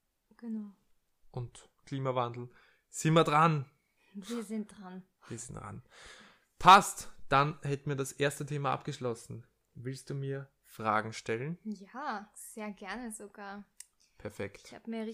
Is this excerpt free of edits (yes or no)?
yes